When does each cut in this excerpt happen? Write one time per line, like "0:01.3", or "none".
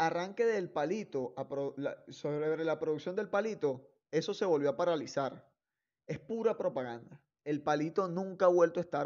none